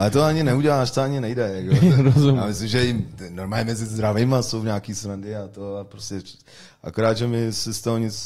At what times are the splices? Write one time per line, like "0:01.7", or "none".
none